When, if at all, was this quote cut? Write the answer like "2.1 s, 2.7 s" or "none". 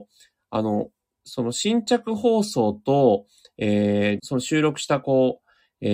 4.2 s